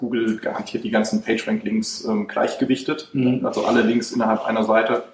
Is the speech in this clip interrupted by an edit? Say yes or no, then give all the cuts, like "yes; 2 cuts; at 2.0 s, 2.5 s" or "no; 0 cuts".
no; 0 cuts